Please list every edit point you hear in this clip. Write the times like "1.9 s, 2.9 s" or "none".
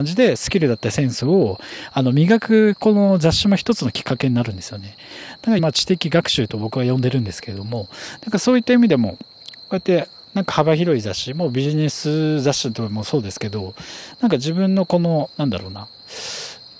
5.6 s